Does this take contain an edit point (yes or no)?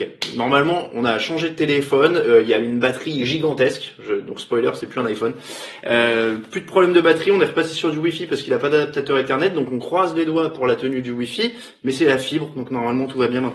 no